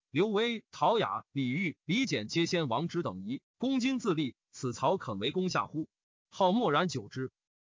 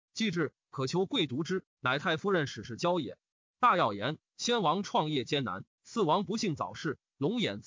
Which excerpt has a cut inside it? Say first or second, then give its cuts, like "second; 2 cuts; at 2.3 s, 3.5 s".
first; 1 cut; at 6.1 s